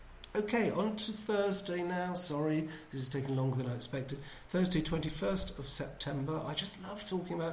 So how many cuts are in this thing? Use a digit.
0